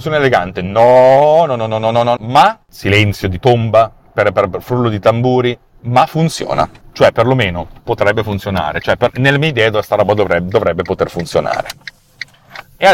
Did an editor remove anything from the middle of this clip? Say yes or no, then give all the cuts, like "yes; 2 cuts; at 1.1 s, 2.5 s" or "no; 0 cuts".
yes; 1 cut; at 2.2 s